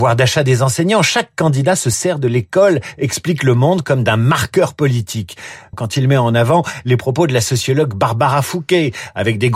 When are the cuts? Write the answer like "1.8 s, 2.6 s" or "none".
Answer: 5.7 s